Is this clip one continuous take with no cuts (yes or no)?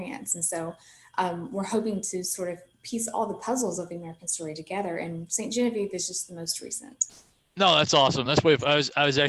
yes